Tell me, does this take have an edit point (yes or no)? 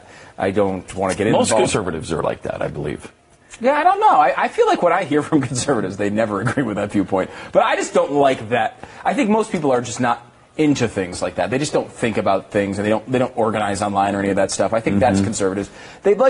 no